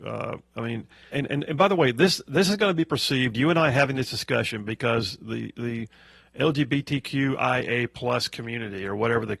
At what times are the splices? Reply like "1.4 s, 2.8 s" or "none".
1.1 s